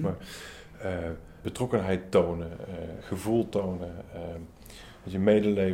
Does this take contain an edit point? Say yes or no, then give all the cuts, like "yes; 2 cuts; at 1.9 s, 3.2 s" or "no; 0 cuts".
yes; 1 cut; at 1.4 s